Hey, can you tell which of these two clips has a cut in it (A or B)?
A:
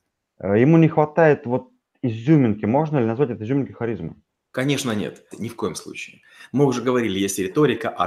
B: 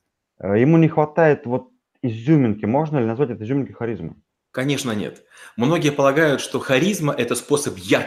A